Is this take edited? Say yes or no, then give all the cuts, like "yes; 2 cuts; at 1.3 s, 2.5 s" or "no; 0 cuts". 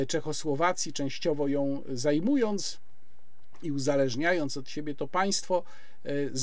no; 0 cuts